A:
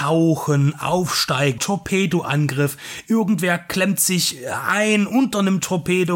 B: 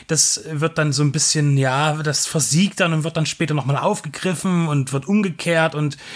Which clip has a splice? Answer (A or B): A